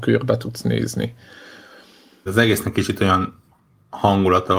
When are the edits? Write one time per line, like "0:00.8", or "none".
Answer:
0:02.3